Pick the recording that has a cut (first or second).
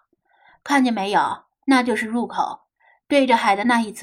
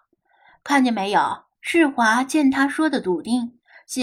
second